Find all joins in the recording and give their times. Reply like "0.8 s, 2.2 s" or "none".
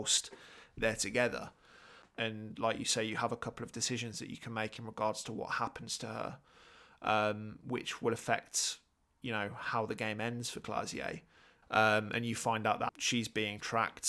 2.0 s, 11.6 s, 12.9 s